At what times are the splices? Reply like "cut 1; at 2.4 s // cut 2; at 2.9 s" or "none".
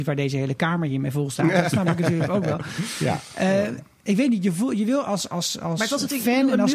none